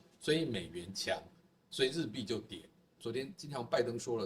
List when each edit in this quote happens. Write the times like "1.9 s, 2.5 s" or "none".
3.0 s